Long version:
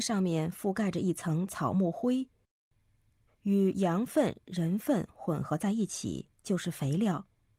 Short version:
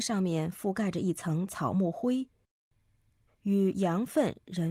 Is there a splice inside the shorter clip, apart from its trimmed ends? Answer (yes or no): no